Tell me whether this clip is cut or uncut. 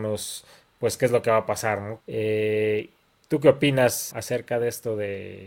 cut